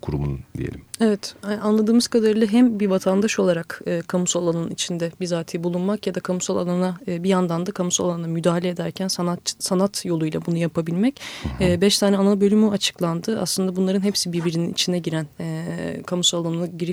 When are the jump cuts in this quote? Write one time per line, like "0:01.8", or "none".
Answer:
none